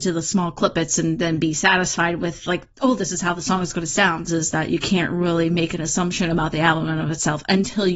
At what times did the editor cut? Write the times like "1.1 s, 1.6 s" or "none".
4.3 s